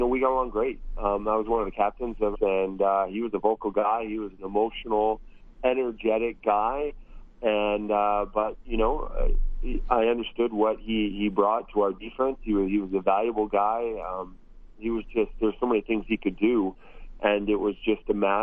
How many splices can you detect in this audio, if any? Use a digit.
1